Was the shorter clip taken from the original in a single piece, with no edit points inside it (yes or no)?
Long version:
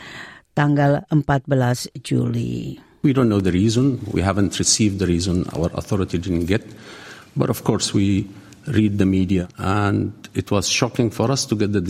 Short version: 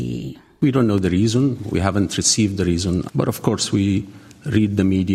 no